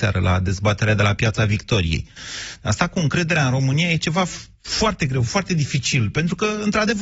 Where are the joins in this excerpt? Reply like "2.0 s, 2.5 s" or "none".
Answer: none